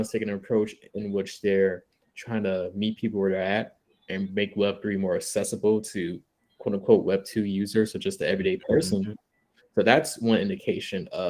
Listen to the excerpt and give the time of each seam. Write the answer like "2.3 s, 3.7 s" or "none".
none